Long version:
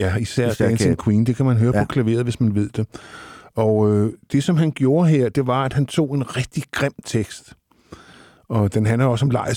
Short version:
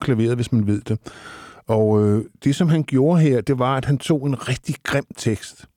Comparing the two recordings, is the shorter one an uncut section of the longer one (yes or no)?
yes